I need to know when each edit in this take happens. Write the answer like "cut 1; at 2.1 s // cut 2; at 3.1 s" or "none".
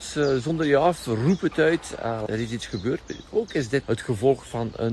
cut 1; at 2.3 s // cut 2; at 3.8 s